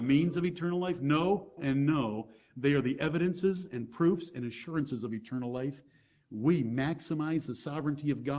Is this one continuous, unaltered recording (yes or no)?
no